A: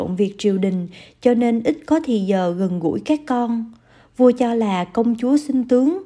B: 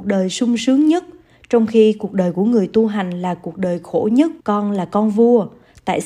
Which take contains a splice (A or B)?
B